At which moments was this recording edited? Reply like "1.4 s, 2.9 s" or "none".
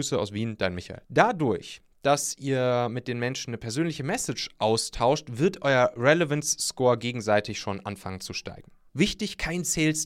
1.0 s, 8.9 s